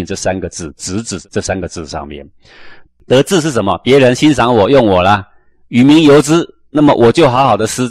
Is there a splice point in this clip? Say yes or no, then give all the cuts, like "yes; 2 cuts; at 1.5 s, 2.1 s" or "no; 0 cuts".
yes; 1 cut; at 2.9 s